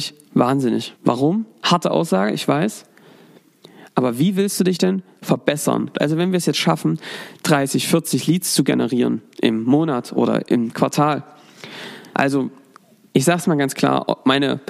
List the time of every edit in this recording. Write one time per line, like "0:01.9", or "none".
0:01.0
0:05.9
0:12.1